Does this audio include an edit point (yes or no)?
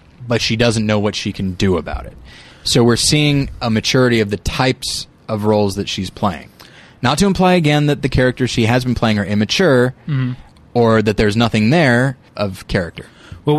yes